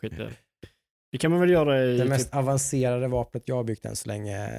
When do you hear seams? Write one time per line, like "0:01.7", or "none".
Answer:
none